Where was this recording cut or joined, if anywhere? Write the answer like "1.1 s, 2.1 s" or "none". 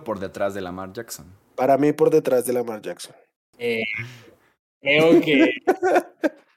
3.5 s